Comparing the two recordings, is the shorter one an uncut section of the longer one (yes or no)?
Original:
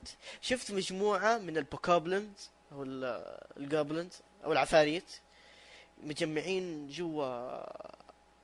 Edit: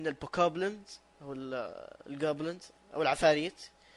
yes